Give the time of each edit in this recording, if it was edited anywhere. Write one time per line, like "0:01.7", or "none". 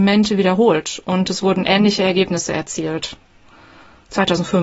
none